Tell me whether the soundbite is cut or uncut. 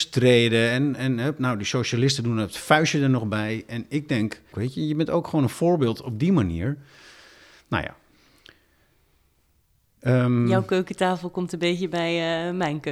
cut